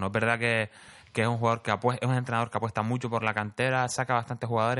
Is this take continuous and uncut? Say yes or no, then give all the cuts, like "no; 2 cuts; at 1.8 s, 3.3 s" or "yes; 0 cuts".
yes; 0 cuts